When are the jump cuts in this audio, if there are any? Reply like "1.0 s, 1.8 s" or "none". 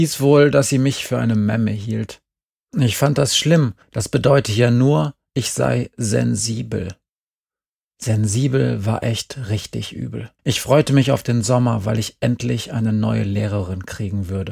3.8 s, 10.4 s